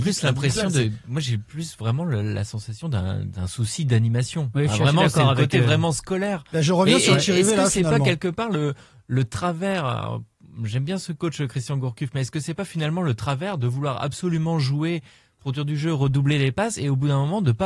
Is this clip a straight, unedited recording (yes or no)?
yes